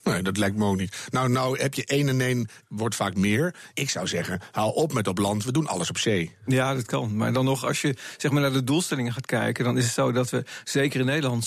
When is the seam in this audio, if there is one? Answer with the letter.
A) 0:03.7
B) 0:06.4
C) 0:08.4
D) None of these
A